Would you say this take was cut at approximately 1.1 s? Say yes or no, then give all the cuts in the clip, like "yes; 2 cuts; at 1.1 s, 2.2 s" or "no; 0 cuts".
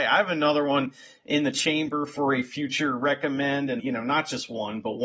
no; 1 cut; at 3.8 s